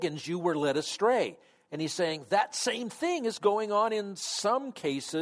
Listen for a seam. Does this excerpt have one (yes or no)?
no